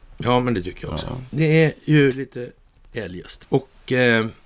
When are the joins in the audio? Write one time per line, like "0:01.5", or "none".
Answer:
0:01.3
0:03.4